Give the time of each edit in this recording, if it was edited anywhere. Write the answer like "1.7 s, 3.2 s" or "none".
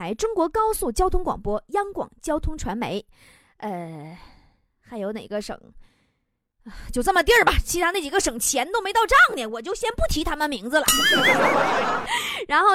none